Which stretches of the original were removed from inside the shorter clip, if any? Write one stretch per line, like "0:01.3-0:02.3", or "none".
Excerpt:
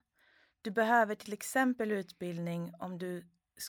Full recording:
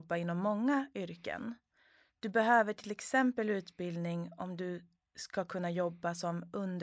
none